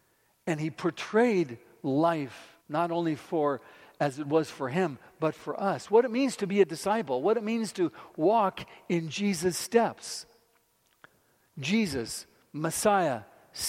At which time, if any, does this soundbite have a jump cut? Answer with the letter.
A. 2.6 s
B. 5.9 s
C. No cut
A